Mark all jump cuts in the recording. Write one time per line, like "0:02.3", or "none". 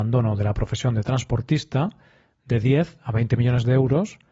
none